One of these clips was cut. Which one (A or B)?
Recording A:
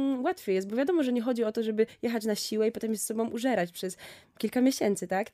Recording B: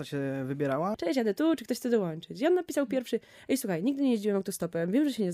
B